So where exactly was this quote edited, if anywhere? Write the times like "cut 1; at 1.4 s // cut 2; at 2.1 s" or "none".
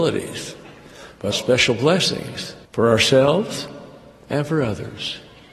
cut 1; at 1.3 s // cut 2; at 2.6 s